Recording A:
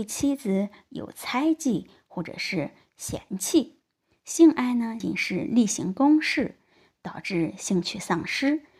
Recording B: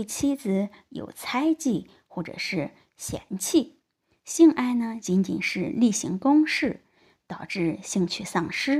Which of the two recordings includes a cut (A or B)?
A